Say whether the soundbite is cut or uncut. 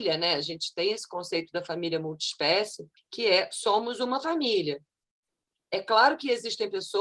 cut